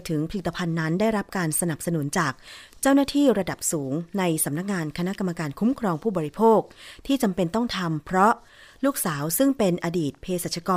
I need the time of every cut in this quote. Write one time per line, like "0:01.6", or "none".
none